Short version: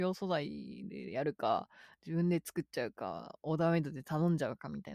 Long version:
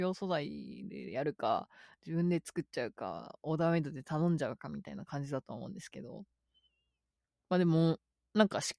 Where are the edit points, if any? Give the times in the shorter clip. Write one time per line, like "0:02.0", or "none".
none